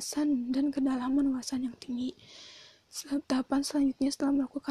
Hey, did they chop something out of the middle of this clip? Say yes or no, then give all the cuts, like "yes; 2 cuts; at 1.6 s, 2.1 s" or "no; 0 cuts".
yes; 1 cut; at 3.2 s